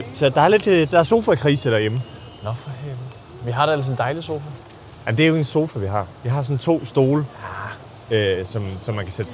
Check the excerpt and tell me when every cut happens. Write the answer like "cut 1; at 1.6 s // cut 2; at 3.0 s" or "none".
none